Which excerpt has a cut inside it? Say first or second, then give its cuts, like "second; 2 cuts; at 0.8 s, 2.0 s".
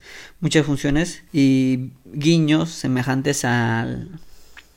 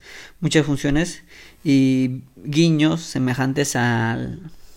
first; 1 cut; at 1.3 s